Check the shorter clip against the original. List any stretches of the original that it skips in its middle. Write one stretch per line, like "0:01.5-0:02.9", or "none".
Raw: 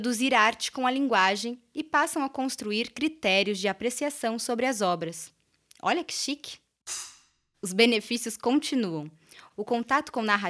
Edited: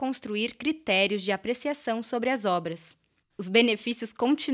0:05.6-0:07.5